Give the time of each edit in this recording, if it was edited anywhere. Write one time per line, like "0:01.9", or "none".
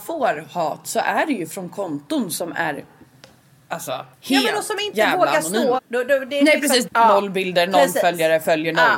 0:04.1
0:05.8
0:06.9